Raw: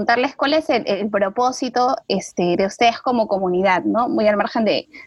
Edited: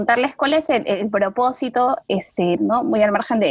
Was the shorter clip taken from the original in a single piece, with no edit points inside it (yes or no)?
no